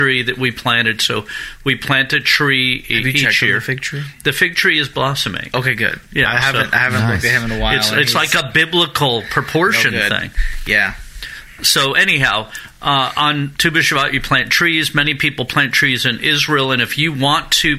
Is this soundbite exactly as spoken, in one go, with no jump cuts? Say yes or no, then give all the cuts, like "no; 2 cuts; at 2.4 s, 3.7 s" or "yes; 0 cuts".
yes; 0 cuts